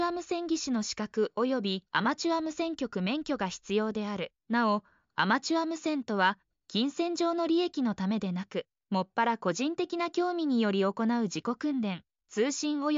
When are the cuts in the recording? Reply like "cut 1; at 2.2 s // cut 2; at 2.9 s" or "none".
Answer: cut 1; at 4.4 s

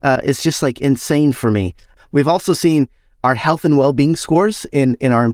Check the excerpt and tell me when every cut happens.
cut 1; at 2.0 s

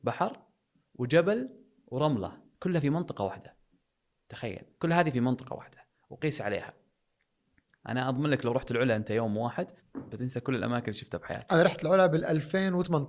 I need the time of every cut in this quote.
cut 1; at 9.8 s

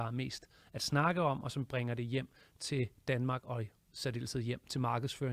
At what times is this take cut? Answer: none

